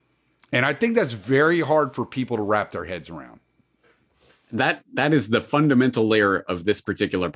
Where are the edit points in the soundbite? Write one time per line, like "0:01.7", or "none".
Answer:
none